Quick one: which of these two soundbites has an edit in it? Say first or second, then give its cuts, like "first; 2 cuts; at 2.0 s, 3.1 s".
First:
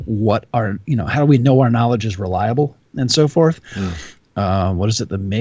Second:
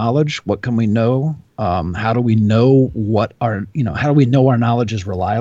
first; 1 cut; at 4.3 s